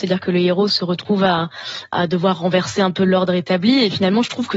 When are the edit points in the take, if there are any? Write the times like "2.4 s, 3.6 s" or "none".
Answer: 1.9 s